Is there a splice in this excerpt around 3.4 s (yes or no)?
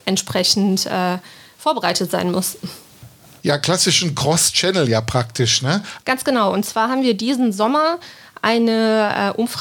no